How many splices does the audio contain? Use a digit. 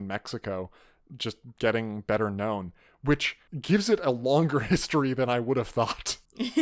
0